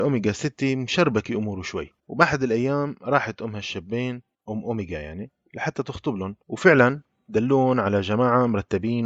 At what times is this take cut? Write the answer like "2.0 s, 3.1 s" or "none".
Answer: 2.0 s, 6.4 s